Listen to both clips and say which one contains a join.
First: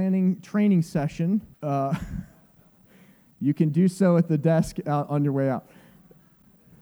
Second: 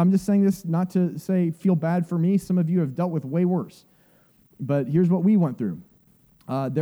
first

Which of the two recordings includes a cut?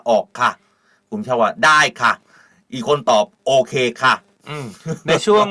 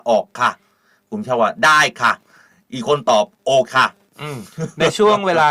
second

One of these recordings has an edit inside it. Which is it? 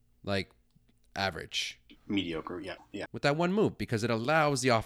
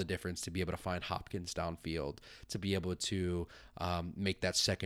first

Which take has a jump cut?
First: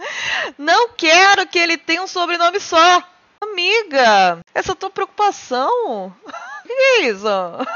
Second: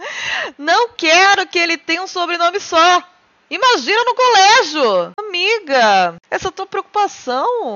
first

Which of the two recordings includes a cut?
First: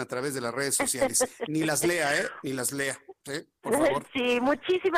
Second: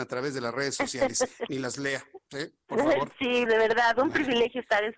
second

